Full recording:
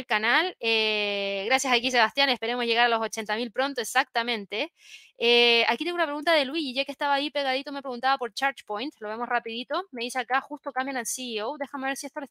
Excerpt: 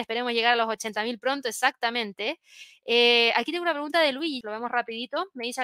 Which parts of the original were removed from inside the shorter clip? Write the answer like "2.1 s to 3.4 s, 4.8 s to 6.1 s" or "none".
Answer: 6.7 s to 9.0 s